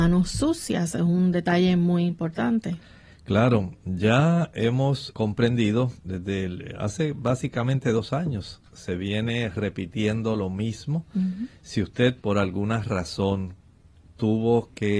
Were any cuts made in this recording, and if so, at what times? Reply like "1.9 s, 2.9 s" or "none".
5.1 s

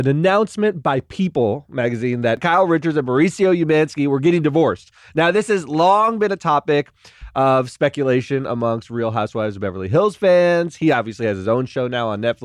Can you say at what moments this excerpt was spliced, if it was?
none

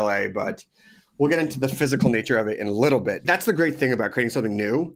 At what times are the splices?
3.2 s

